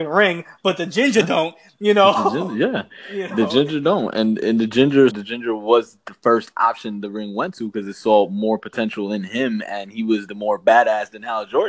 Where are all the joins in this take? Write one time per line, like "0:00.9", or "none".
0:05.1